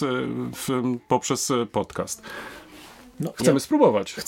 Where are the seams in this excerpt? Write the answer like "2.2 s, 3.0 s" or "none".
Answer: none